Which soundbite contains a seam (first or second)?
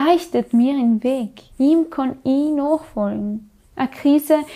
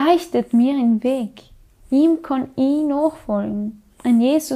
first